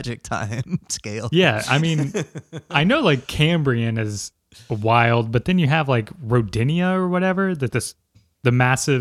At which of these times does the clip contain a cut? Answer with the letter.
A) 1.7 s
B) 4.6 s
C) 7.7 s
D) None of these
C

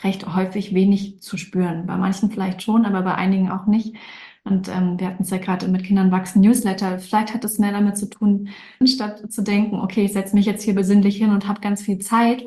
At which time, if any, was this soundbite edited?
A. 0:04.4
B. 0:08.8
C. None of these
B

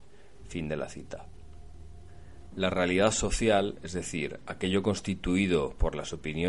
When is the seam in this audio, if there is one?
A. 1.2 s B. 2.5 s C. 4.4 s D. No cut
B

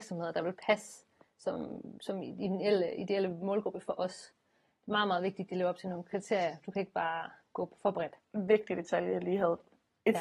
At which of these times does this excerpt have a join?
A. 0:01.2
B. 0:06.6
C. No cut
C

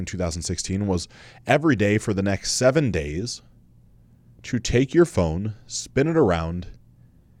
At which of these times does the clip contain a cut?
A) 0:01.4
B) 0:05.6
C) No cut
C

